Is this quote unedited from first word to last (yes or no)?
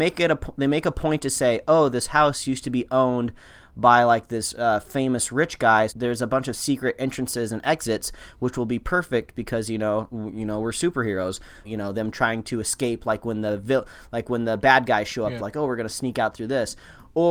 no